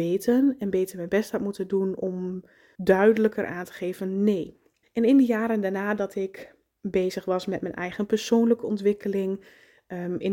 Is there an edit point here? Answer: yes; 2 cuts; at 2.7 s, 4.8 s

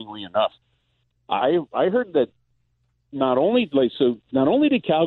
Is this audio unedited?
no; 1 cut; at 1.4 s

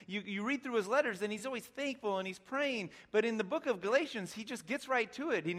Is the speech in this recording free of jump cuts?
yes; 0 cuts

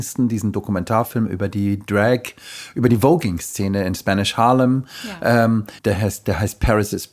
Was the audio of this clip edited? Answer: yes; 1 cut; at 5.8 s

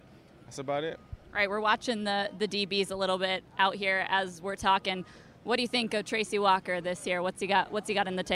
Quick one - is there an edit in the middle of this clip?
no; 0 cuts

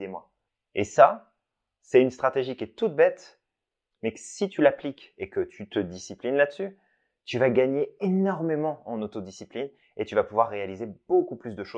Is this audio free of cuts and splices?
yes; 0 cuts

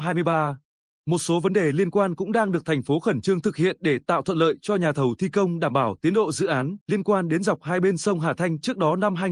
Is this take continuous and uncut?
no; 2 cuts; at 1.0 s, 6.8 s

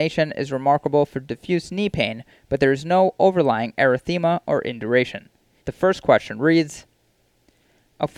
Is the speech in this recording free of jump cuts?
no; 1 cut; at 5.6 s

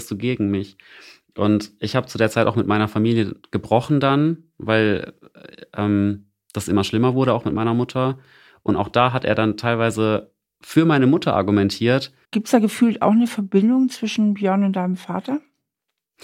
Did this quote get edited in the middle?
yes; 1 cut; at 12.2 s

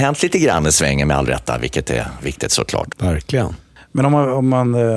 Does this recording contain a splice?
yes; 1 cut; at 2.9 s

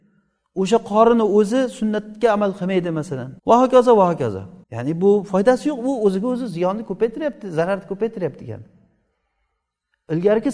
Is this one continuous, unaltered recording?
no; 2 cuts; at 3.4 s, 4.6 s

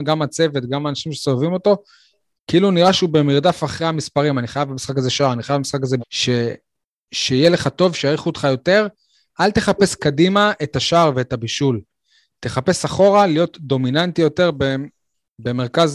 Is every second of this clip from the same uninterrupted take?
no; 1 cut; at 6.0 s

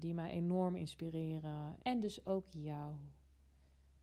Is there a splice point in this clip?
yes; 1 cut; at 1.8 s

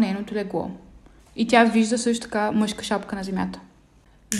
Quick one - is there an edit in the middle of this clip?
yes; 1 cut; at 1.2 s

